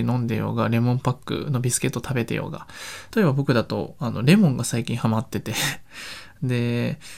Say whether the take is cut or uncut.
cut